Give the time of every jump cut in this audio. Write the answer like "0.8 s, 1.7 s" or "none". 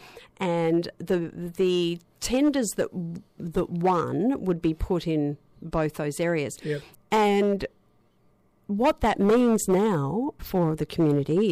6.9 s, 10.4 s

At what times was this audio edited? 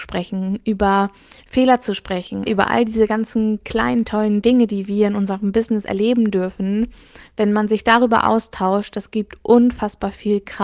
2.5 s

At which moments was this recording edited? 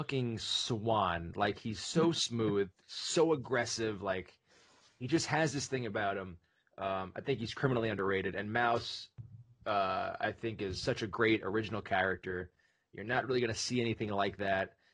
none

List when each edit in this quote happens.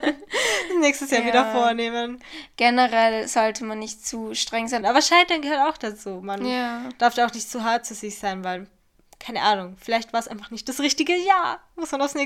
4.8 s

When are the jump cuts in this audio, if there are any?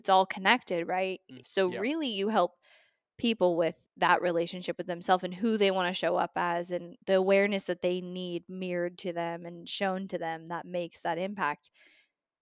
1.4 s, 3.9 s, 7.0 s

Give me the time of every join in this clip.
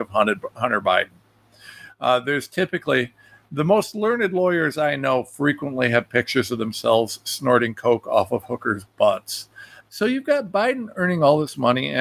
9.8 s

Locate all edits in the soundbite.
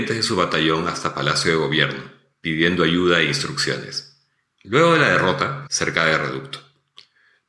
4.6 s, 5.7 s

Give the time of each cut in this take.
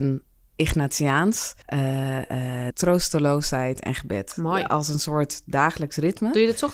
1.6 s, 2.7 s

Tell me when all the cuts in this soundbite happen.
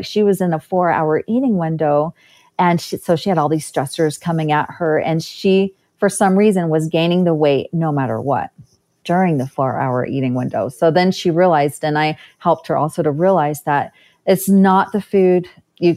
none

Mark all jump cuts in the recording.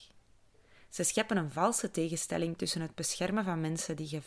none

